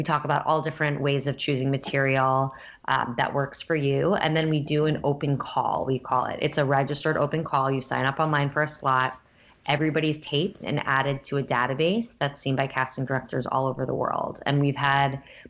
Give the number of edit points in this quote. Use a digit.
0